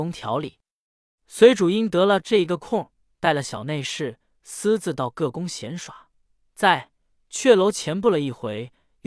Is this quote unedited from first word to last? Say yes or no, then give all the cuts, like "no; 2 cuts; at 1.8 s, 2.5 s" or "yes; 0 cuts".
yes; 0 cuts